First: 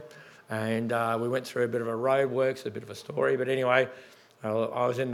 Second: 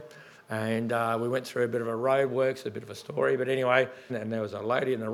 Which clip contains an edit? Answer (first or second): second